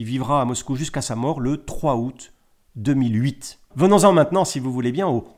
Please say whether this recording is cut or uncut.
cut